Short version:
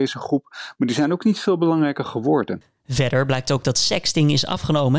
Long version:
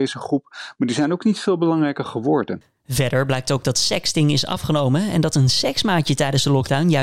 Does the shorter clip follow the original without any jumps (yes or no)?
yes